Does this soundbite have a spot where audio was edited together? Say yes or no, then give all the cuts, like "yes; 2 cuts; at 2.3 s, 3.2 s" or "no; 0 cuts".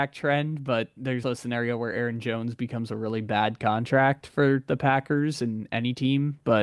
yes; 1 cut; at 1.2 s